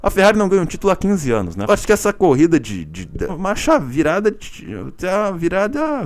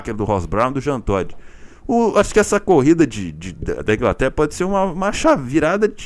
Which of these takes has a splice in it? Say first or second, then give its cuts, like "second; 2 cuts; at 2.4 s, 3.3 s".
first; 2 cuts; at 1.7 s, 3.3 s